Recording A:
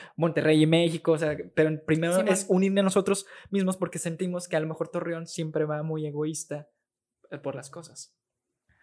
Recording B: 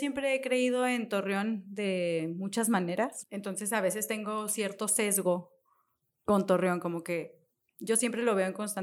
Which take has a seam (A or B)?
B